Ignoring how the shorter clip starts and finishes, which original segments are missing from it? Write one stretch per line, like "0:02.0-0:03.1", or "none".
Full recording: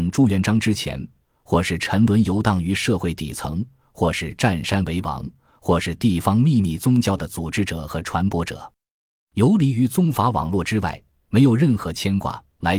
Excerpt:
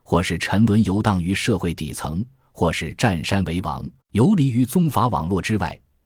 0:05.4-0:09.2